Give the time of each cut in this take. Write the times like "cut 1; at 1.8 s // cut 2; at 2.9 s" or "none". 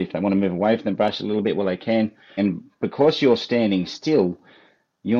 cut 1; at 2.4 s